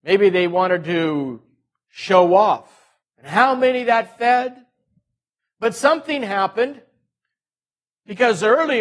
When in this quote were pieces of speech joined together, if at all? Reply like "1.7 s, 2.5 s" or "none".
3.0 s, 5.4 s